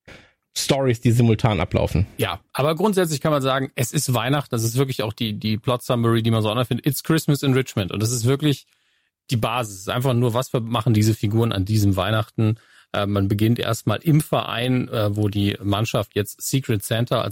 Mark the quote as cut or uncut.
uncut